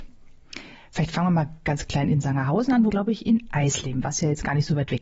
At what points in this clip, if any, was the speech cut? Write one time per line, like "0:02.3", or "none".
0:02.9
0:04.0